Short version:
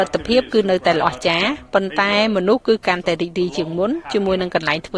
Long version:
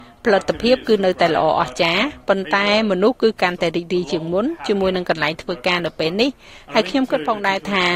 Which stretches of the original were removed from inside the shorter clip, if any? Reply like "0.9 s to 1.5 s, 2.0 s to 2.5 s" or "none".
1.3 s to 1.5 s